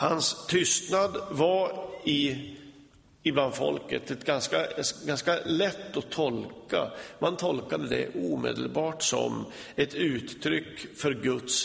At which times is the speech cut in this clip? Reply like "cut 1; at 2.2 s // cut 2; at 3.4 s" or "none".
none